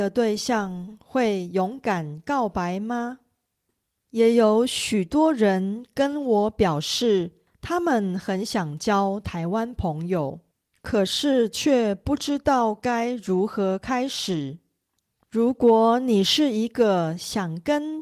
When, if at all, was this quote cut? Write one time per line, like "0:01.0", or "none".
none